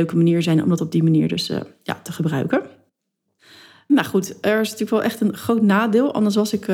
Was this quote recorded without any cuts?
yes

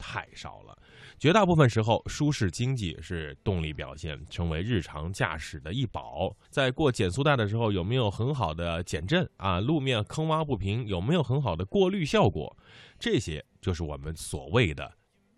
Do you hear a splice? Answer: yes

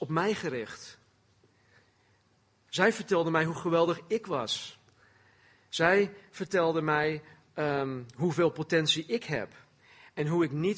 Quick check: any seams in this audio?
no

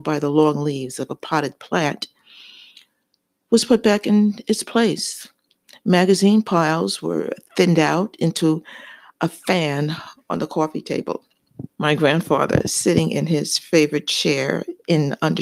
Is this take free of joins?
no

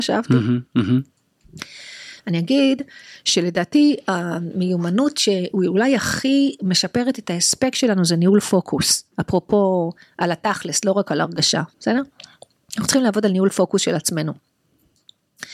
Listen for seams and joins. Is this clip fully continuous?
yes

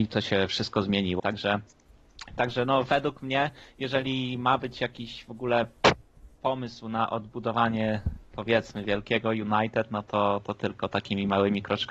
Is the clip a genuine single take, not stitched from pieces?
no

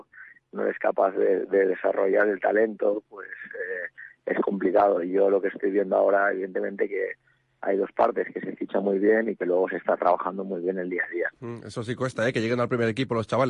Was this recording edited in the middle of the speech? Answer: no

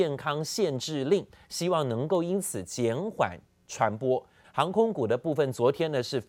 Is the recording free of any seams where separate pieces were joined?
no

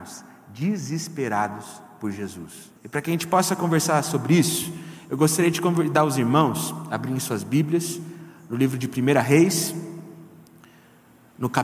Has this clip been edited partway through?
yes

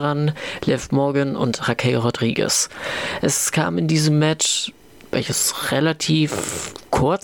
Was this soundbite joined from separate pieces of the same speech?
no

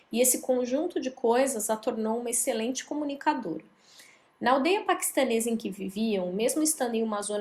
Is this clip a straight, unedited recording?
yes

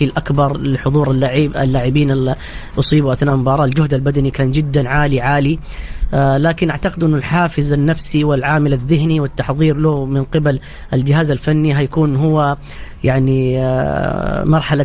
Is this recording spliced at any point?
no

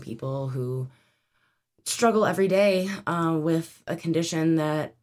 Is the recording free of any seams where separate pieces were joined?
yes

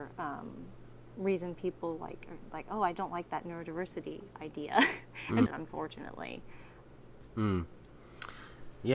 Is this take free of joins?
no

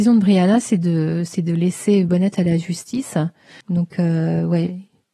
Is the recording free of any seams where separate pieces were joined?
no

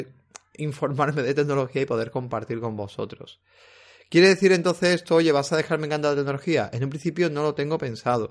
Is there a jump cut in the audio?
no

